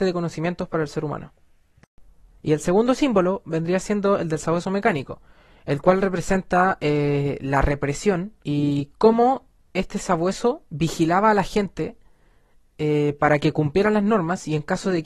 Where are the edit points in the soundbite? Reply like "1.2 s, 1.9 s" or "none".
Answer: 2.4 s, 8.4 s, 10.7 s

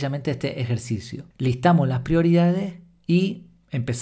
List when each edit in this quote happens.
1.3 s

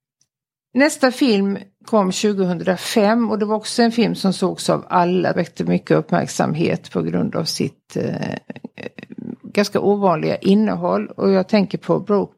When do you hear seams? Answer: 5.3 s

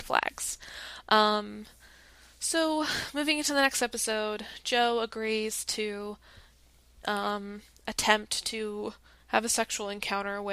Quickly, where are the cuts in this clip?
none

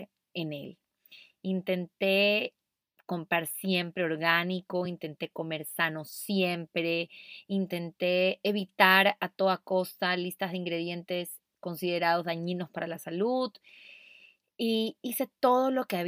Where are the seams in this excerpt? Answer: none

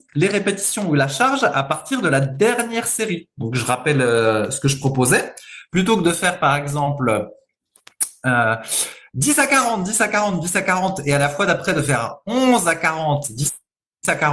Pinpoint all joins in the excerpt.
none

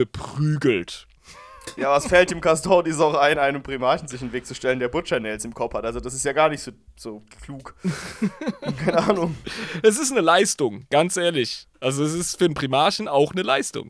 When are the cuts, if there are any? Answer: none

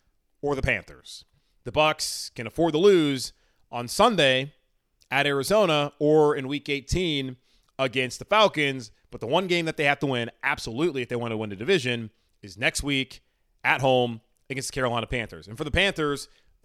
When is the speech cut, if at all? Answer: none

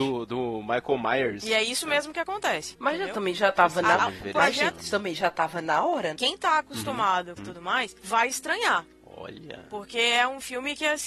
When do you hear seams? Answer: 2.7 s, 6.2 s, 7.4 s

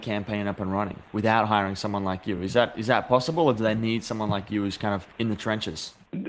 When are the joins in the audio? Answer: none

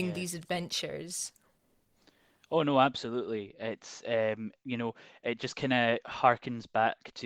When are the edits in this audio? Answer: none

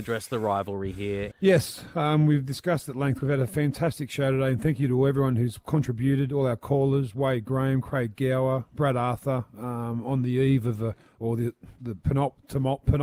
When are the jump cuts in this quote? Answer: 1.3 s

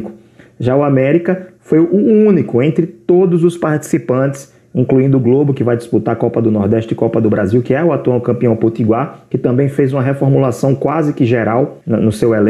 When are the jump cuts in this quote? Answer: none

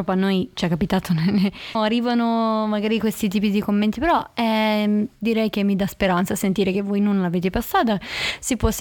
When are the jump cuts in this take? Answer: 1.8 s

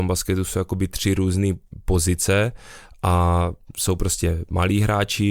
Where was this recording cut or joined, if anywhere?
none

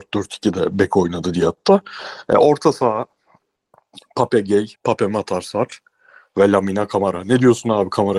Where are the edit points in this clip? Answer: 4.7 s

